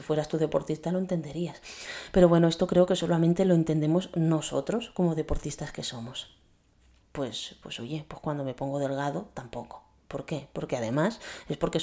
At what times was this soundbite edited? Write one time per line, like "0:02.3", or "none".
0:07.0